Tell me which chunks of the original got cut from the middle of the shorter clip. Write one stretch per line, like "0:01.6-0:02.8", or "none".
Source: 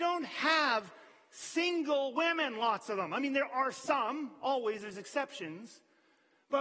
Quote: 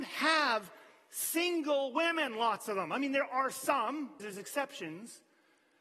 0:04.4-0:04.8